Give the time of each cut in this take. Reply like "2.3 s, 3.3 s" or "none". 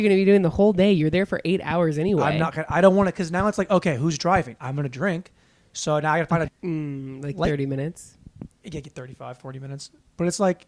6.5 s, 8.5 s